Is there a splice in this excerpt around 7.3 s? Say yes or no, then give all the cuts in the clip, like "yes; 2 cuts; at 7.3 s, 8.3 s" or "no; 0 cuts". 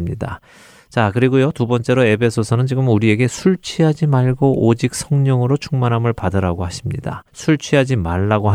yes; 1 cut; at 7.3 s